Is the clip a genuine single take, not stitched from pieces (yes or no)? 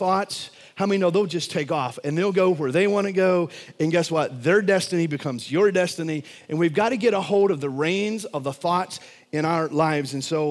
yes